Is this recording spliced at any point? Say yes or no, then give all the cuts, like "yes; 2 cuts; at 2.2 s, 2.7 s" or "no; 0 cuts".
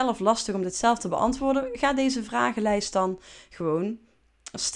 no; 0 cuts